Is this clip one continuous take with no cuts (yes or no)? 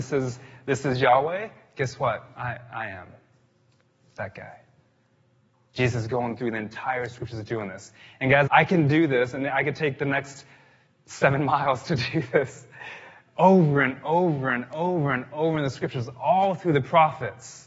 no